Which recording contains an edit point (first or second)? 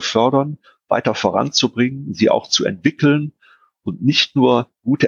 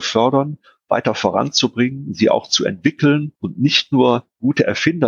second